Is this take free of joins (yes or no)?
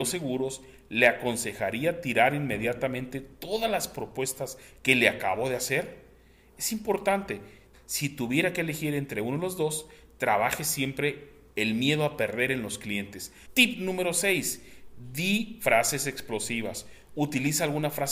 no